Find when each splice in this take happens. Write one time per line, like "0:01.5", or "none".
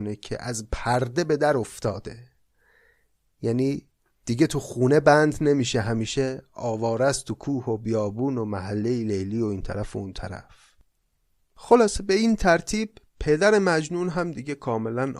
none